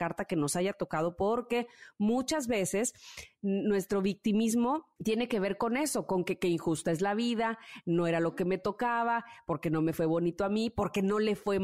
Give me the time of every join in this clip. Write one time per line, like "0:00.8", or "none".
0:05.0